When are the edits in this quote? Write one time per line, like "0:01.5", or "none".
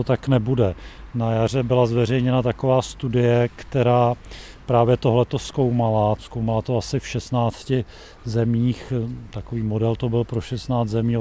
none